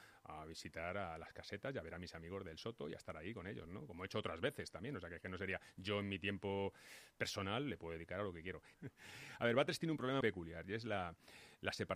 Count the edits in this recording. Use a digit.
2